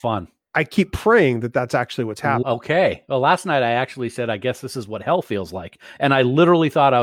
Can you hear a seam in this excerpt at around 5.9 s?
no; 1 cut; at 2.4 s

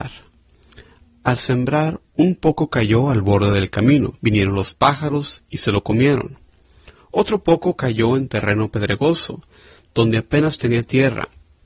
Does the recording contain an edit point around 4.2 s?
yes; 1 cut; at 4.2 s

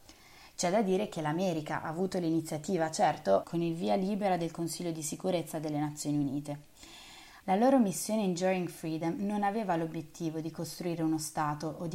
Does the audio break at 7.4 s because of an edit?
yes; 2 cuts; at 3.4 s, 7.4 s

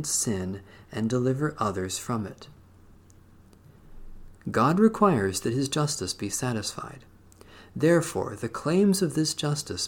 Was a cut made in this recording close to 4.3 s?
yes; 1 cut; at 4.3 s

